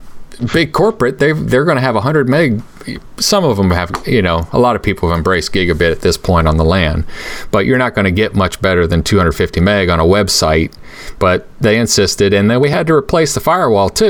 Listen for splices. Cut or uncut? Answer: uncut